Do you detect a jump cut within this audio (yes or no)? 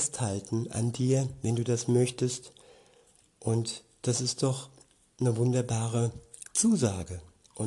no